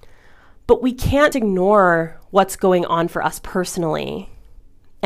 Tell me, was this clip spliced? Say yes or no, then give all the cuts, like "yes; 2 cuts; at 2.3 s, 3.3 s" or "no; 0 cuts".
yes; 1 cut; at 1.3 s